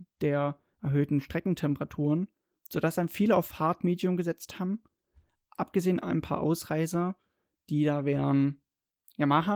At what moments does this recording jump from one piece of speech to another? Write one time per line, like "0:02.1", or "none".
none